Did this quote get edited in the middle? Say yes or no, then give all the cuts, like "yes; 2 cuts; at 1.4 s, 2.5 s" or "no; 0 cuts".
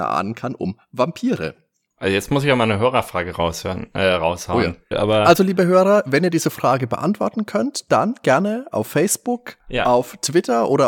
yes; 1 cut; at 4.9 s